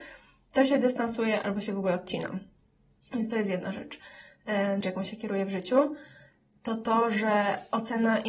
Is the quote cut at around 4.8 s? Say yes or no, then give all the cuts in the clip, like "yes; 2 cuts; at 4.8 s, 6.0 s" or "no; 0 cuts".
yes; 1 cut; at 4.8 s